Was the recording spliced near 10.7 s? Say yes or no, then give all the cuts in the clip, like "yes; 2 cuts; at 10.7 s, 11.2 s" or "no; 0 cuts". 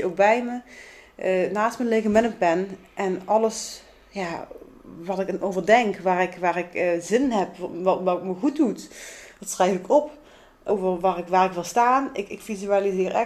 yes; 1 cut; at 10.7 s